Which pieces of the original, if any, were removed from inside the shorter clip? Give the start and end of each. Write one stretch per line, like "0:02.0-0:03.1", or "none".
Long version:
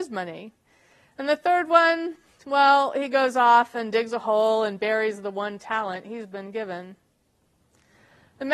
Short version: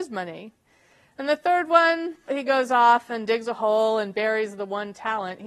0:02.3-0:02.9